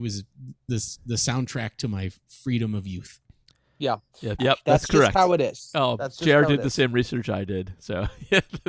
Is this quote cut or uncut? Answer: cut